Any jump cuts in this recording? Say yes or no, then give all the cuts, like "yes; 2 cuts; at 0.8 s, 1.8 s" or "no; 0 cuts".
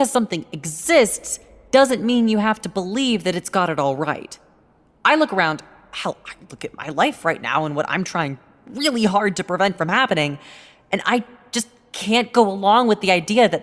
no; 0 cuts